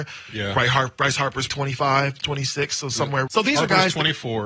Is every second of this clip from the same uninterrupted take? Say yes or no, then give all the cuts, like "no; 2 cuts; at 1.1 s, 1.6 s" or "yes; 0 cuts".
no; 2 cuts; at 1.5 s, 3.3 s